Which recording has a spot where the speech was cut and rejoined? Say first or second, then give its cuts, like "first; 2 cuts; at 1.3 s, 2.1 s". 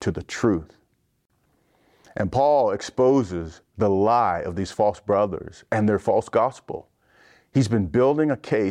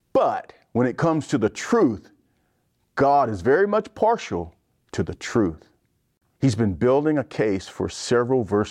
second; 1 cut; at 6.3 s